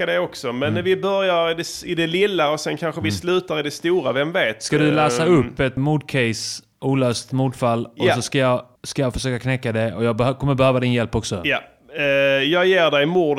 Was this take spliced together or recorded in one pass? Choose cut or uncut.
cut